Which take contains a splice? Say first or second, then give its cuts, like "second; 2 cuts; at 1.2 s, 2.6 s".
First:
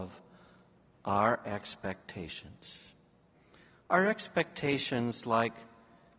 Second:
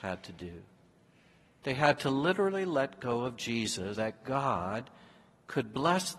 second; 1 cut; at 3.9 s